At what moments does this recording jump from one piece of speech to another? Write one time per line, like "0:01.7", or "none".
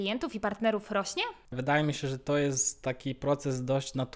0:01.5